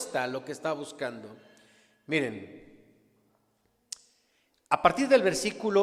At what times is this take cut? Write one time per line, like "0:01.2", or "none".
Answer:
none